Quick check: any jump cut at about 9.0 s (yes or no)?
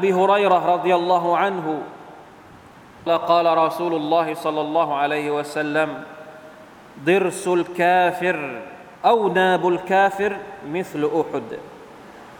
yes